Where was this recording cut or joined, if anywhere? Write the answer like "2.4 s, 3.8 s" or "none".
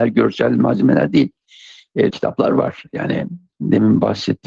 2.1 s